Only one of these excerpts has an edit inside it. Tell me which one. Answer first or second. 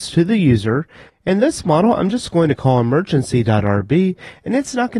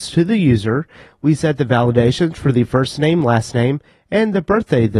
first